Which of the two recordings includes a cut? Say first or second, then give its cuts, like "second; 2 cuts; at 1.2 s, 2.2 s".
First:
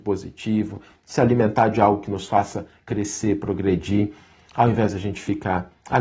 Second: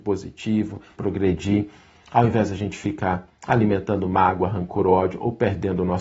second; 1 cut; at 1.0 s